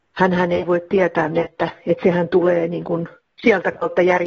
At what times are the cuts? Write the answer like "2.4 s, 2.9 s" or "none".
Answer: 1.3 s